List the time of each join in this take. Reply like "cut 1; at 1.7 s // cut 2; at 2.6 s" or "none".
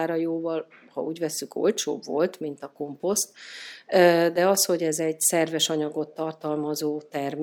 none